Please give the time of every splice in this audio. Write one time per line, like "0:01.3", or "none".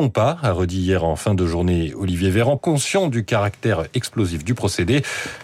0:02.6